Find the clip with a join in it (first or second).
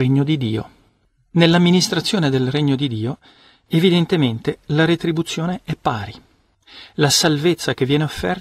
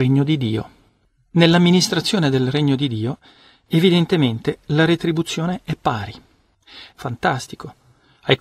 second